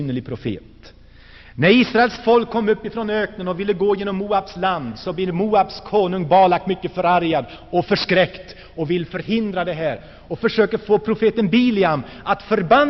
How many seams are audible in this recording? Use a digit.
0